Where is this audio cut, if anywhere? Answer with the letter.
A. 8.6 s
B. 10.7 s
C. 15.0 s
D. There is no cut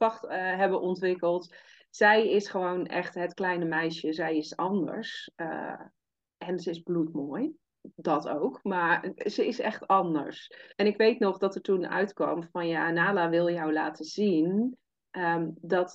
B